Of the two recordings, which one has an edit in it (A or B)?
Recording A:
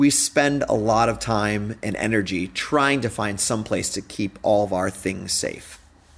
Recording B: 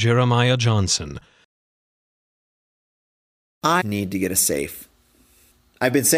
B